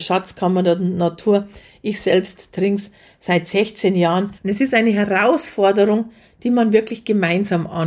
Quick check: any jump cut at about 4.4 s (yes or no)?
yes